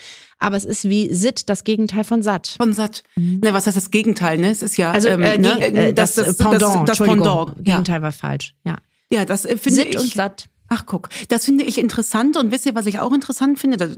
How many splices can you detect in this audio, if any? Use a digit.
2